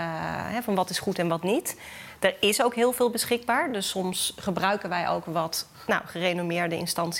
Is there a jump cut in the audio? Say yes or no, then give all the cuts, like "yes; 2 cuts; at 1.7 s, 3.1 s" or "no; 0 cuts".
no; 0 cuts